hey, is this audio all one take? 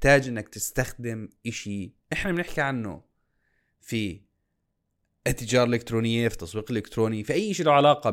no; 1 cut; at 2.0 s

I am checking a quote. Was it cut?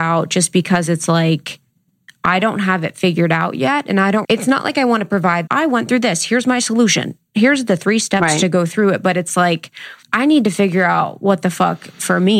yes; 2 cuts; at 4.2 s, 5.5 s

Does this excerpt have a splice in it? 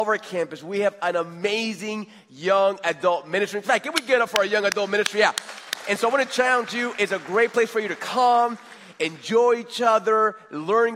no; 0 cuts

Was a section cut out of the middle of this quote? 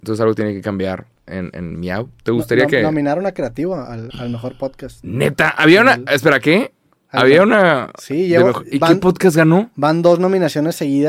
yes; 1 cut; at 4.1 s

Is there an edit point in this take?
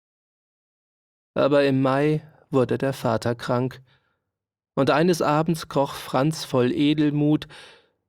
no; 0 cuts

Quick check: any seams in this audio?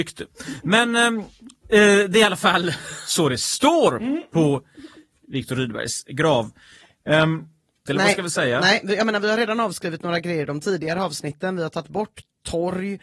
yes; 1 cut; at 7.9 s

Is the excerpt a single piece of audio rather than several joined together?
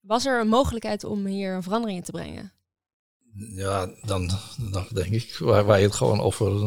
no; 1 cut; at 4.9 s

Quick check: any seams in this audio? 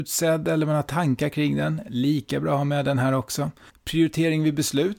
yes; 1 cut; at 3.7 s

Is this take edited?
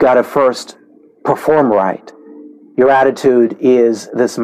yes; 1 cut; at 2.7 s

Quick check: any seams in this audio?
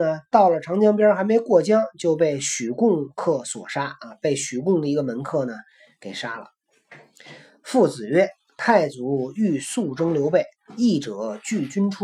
no; 0 cuts

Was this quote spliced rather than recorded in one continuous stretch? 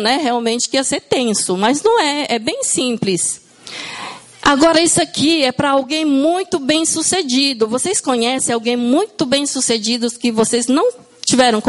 no; 0 cuts

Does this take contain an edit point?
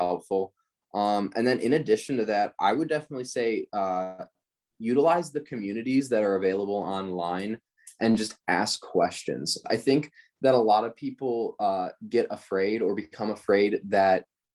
yes; 1 cut; at 9.6 s

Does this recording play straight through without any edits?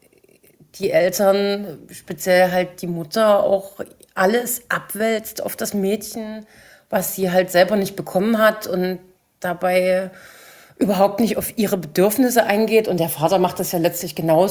yes; 0 cuts

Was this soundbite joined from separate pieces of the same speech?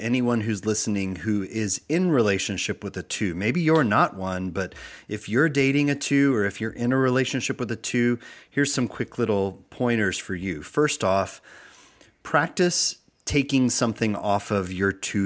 no; 0 cuts

